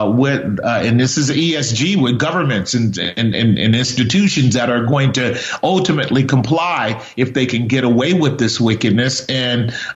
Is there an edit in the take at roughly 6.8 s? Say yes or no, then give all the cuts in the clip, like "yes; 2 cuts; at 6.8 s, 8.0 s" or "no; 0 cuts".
no; 1 cut; at 3.3 s